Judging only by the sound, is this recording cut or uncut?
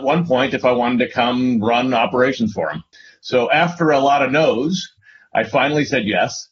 uncut